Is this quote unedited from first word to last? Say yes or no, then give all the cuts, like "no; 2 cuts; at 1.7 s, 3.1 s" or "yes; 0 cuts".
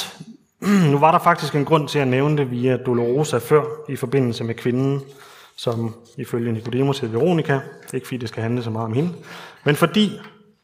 yes; 0 cuts